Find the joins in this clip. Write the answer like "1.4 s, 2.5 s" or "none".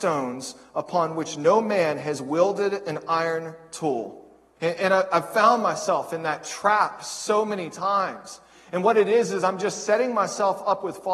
4.6 s